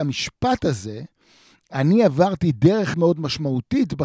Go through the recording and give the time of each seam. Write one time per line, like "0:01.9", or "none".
0:02.9